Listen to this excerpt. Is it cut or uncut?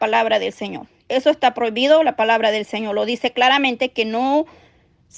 cut